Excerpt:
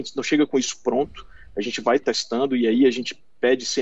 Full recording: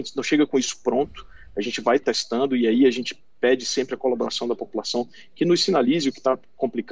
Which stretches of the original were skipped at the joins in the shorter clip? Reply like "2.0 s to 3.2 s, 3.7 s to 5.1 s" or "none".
none